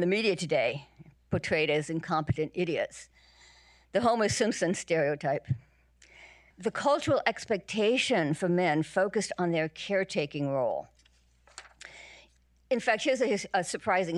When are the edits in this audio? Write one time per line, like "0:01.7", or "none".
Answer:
0:06.5